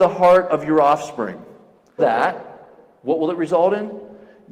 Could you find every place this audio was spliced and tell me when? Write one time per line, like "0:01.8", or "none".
0:02.0